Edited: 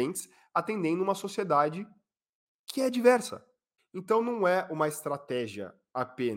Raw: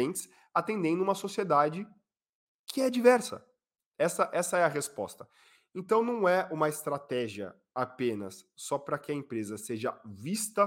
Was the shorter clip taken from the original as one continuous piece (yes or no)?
no